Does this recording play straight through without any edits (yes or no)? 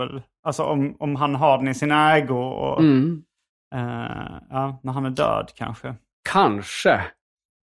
yes